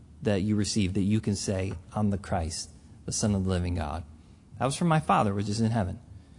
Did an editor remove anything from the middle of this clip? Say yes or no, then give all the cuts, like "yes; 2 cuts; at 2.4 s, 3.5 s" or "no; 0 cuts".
no; 0 cuts